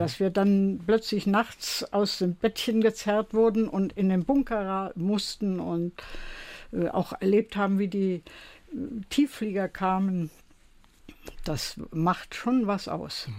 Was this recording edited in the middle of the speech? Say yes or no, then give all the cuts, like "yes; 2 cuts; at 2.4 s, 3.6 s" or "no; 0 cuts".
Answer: no; 0 cuts